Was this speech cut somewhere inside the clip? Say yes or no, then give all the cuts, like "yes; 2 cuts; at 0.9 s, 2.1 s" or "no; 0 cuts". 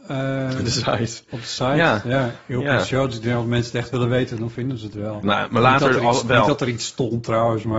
yes; 1 cut; at 5.2 s